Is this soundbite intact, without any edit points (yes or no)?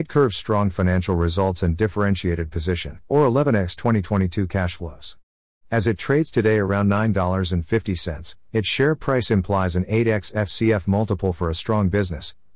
no